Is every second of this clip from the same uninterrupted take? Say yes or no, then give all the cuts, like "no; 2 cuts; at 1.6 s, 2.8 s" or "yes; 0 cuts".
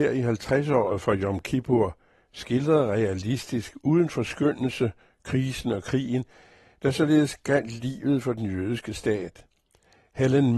yes; 0 cuts